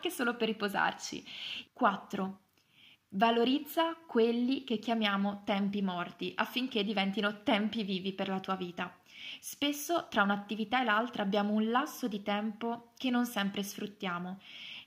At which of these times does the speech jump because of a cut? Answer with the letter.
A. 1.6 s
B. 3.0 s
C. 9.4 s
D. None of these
A